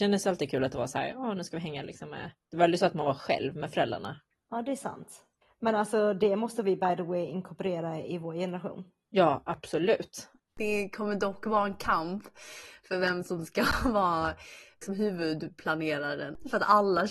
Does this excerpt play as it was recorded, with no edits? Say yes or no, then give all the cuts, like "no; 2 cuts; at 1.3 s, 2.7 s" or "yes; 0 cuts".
yes; 0 cuts